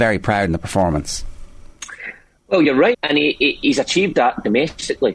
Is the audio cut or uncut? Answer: cut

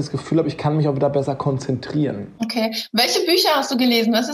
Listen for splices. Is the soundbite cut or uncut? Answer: uncut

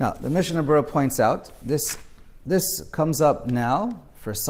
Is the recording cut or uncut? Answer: uncut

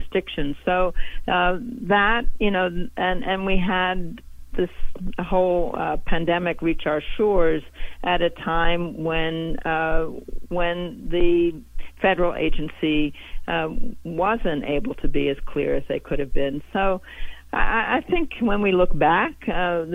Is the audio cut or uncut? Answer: uncut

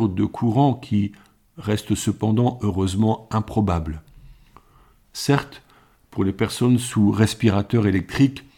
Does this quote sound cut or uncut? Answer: uncut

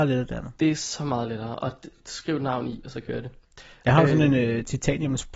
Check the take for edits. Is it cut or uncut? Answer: uncut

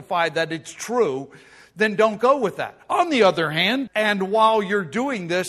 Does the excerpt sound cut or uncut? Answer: cut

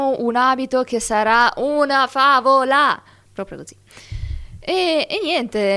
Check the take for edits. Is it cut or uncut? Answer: cut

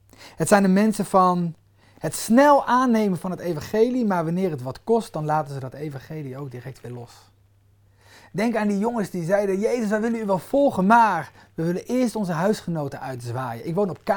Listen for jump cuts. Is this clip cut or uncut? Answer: uncut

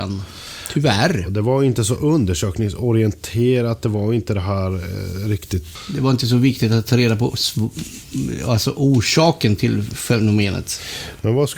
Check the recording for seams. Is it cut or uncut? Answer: uncut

